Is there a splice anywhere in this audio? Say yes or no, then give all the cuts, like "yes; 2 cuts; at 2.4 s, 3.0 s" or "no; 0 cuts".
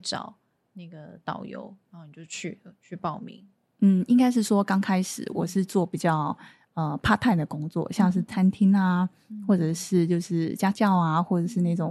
no; 0 cuts